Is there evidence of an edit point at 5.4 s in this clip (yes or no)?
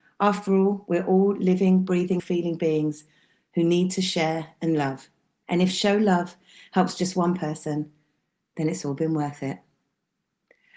no